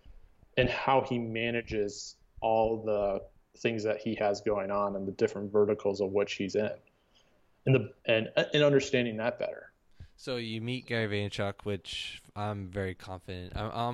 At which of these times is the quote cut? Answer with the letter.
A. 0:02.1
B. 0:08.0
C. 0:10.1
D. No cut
B